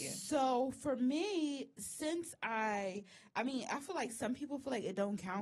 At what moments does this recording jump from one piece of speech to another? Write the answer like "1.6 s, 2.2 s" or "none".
none